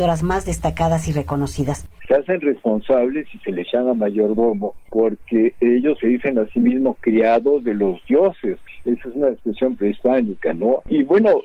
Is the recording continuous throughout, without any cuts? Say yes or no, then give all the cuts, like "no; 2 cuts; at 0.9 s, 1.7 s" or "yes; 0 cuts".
no; 1 cut; at 2.0 s